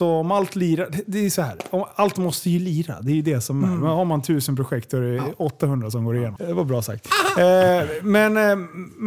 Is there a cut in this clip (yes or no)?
yes